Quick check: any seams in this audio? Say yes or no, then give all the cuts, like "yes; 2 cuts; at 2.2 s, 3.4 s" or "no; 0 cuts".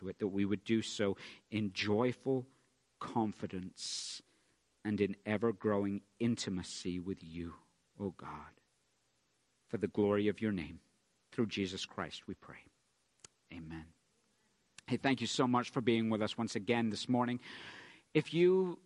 no; 0 cuts